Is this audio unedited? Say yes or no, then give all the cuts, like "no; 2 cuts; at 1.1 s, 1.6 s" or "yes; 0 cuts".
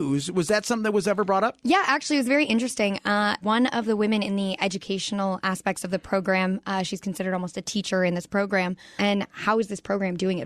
no; 2 cuts; at 3.4 s, 9.0 s